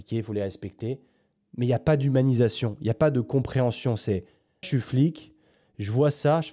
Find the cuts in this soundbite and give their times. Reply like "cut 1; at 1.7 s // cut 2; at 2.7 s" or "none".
cut 1; at 4.6 s